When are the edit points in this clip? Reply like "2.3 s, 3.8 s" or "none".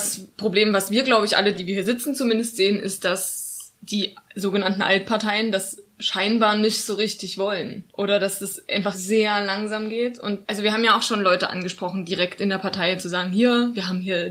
1.5 s, 8.9 s